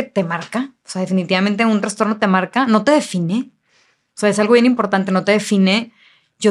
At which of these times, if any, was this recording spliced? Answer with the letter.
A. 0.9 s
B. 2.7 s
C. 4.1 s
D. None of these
D